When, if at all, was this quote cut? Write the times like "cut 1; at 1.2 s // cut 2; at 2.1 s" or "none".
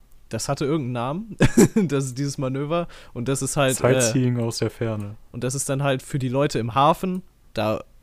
cut 1; at 5.3 s